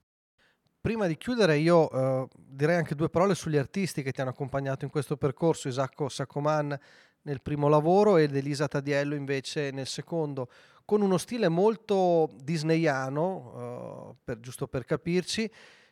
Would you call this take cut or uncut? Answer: uncut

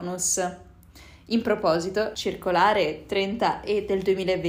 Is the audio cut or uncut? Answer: cut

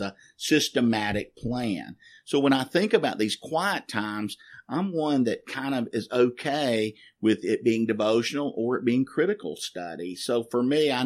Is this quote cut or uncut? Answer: uncut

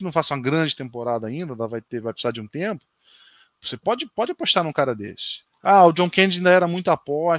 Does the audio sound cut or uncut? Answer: cut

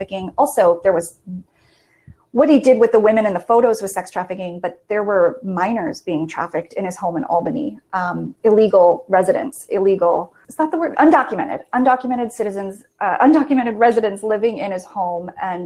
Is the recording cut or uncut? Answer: uncut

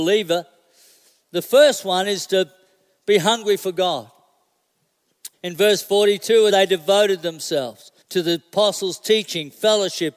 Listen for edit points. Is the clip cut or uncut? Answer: cut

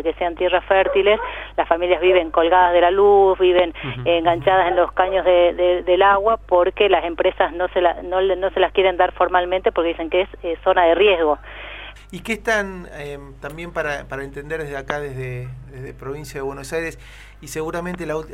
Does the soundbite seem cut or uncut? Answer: cut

